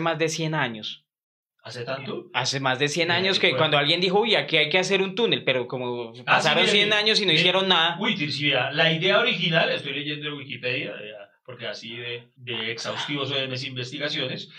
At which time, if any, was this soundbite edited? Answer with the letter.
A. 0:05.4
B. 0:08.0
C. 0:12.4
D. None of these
C